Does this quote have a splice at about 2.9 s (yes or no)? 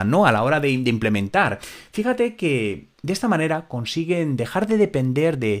yes